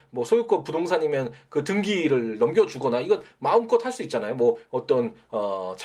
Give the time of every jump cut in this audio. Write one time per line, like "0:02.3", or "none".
none